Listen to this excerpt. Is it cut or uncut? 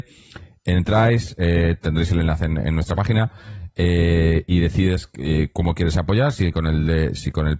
uncut